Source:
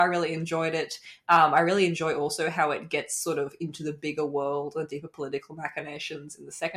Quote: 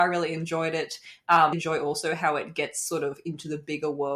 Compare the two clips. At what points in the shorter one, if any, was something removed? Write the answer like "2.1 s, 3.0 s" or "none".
1.5 s